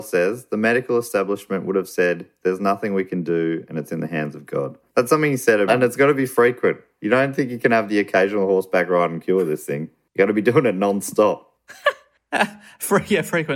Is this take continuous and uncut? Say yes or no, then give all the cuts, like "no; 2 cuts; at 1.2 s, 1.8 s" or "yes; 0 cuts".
no; 1 cut; at 5.7 s